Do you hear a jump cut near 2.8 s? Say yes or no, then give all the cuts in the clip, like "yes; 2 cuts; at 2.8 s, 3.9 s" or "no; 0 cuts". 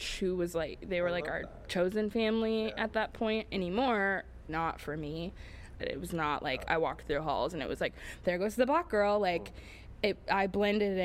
no; 2 cuts; at 4.5 s, 5.8 s